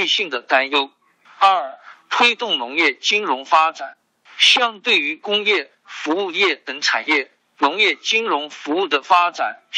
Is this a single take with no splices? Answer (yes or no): yes